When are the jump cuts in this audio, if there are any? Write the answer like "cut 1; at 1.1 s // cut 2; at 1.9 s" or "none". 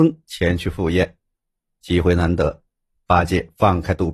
none